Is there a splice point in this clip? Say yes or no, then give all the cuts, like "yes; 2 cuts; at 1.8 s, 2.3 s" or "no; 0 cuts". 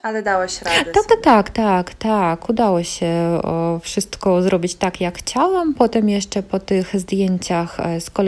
no; 0 cuts